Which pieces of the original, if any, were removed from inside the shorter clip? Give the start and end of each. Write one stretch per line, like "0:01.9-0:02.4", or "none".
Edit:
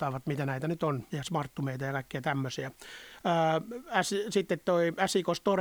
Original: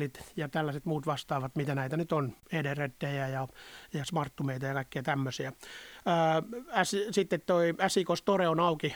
0:02.4-0:03.9